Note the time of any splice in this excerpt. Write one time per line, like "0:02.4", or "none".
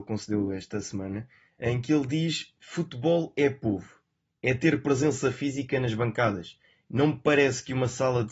none